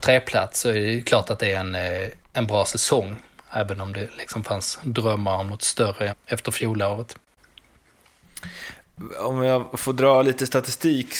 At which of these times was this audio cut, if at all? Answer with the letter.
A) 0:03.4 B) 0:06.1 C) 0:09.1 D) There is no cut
B